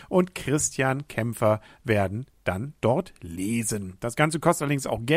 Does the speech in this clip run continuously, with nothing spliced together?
yes; 0 cuts

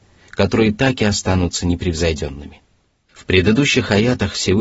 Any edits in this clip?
yes; 1 cut; at 3.1 s

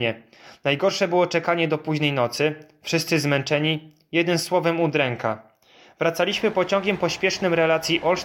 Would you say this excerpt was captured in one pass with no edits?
yes; 0 cuts

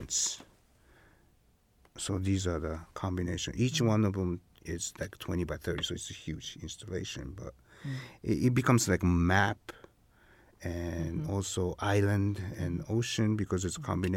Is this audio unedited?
yes; 0 cuts

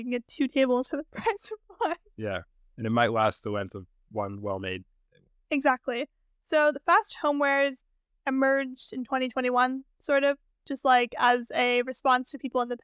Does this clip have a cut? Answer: no; 0 cuts

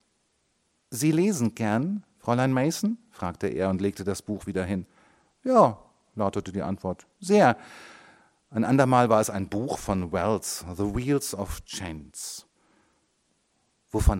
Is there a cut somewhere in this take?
no; 0 cuts

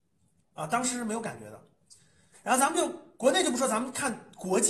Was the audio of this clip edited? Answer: yes; 1 cut; at 2.3 s

